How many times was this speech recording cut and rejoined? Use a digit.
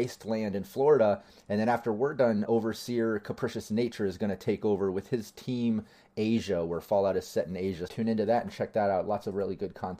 2